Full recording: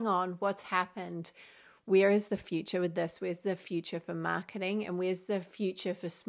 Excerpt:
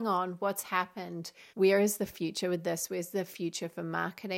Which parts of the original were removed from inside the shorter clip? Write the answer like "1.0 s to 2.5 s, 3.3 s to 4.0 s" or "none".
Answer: 1.5 s to 1.8 s